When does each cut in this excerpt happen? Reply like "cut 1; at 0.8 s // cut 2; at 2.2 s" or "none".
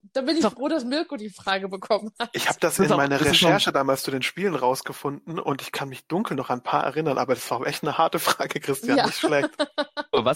none